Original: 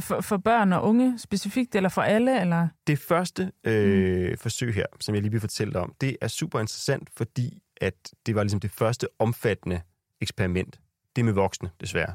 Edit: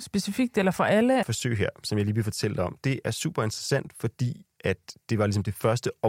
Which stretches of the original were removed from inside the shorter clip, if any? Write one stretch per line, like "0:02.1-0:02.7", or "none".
0:02.4-0:04.4